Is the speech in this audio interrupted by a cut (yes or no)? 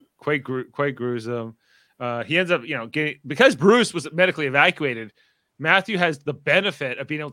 no